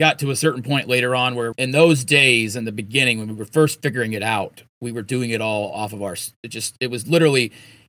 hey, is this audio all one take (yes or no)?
no